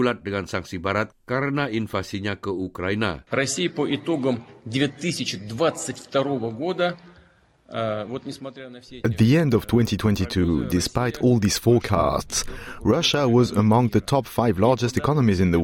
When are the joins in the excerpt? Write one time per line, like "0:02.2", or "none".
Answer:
0:03.3